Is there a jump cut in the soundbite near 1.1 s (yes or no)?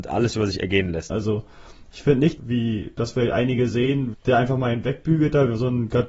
yes